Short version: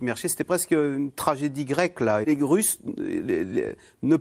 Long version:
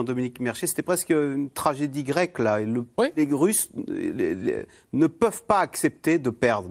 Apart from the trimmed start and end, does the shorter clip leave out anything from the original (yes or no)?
yes